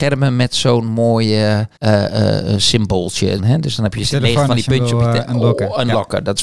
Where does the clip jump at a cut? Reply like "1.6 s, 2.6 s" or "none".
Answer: 1.8 s, 3.4 s

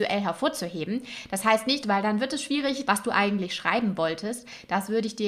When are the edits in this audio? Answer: 1.8 s, 2.8 s

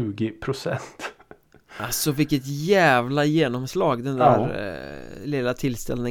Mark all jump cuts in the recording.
none

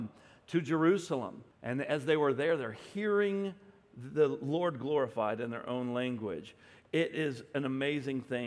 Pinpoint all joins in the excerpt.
1.5 s

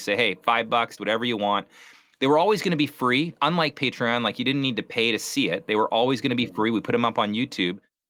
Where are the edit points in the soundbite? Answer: 1.0 s

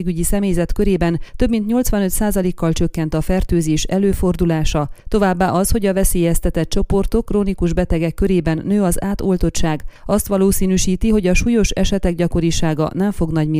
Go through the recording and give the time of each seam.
7.3 s

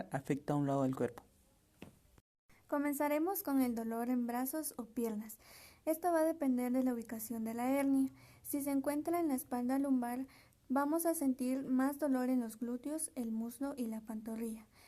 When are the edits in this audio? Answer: none

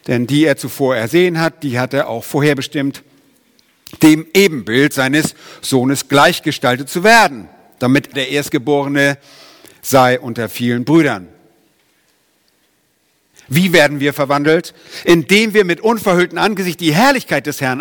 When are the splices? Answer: 8.1 s, 13.3 s

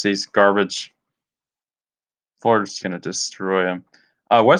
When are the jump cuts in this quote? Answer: 2.8 s

